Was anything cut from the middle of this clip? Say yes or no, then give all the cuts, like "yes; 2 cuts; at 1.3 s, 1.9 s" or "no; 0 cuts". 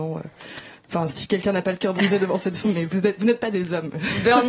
yes; 1 cut; at 2.6 s